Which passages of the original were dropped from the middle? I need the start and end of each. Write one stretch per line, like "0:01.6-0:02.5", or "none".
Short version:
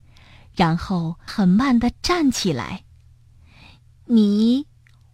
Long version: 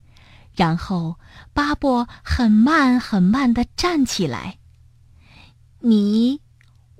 0:01.3-0:03.0